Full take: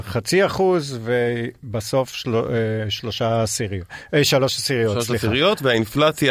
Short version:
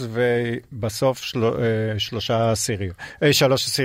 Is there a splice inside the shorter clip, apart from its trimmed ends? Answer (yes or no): no